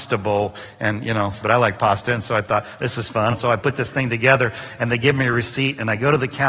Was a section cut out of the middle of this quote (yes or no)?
yes